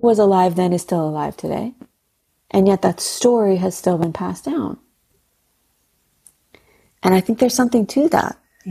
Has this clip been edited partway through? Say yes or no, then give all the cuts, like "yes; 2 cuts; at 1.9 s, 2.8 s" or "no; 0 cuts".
no; 0 cuts